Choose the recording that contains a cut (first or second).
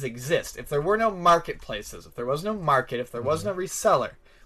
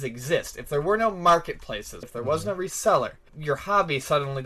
second